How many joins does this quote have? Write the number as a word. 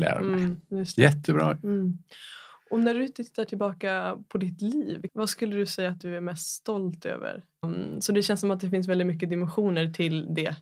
two